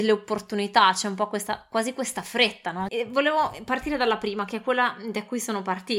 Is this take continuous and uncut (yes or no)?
no